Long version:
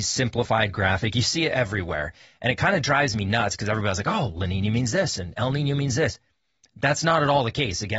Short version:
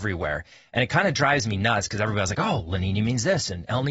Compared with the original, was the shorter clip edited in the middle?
no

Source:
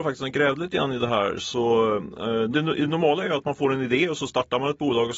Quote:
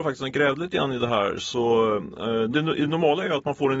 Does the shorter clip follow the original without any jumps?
yes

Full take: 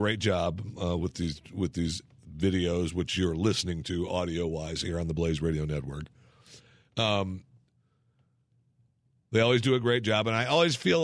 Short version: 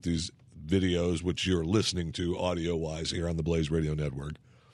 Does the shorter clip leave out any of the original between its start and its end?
no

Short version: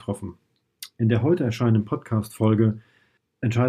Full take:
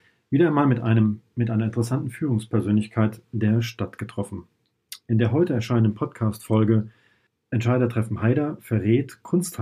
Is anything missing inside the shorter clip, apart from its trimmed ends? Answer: no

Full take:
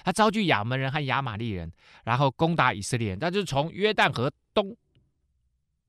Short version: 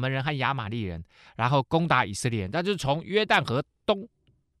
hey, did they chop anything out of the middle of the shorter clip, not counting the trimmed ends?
no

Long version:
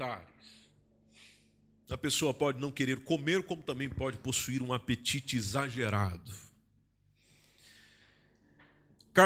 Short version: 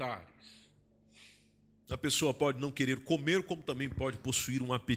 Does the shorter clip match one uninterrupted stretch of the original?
yes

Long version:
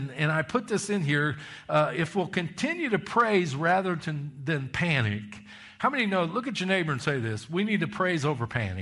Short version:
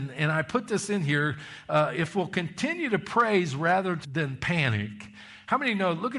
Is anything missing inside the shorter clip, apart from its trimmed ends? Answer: yes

